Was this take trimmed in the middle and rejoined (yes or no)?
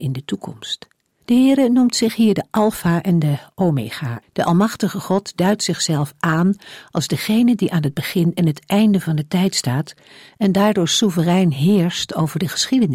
yes